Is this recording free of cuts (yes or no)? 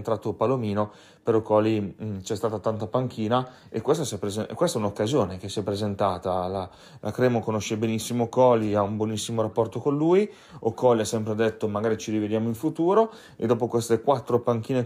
yes